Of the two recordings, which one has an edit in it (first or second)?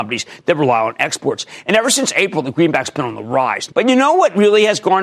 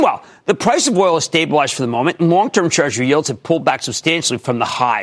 first